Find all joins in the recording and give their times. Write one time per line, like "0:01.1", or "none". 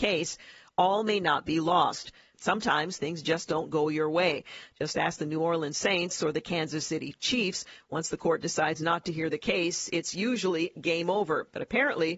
0:02.3